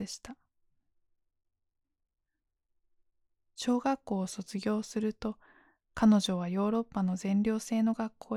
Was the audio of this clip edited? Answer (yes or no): no